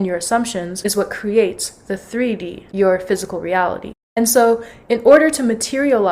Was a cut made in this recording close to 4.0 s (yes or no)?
no